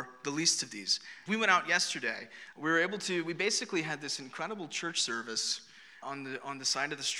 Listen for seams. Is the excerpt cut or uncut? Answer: cut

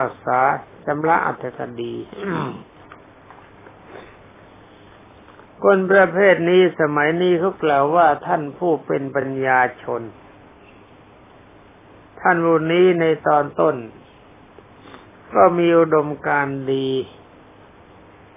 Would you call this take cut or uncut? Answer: uncut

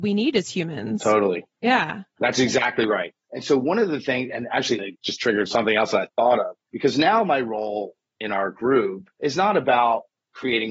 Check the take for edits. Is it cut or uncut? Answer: cut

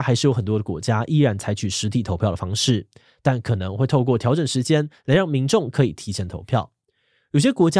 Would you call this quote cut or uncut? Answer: uncut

